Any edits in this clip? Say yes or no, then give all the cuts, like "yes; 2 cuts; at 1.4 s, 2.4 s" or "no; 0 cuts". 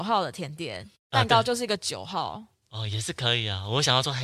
no; 0 cuts